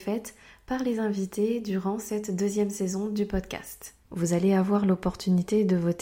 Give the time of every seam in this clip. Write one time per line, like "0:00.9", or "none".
0:04.1